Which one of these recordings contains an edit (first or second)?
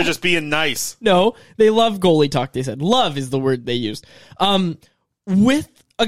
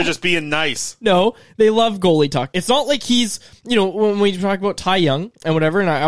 second